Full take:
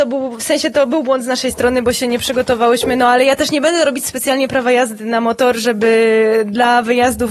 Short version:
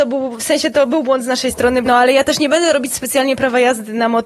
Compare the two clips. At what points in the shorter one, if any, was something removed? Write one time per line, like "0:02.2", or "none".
0:01.8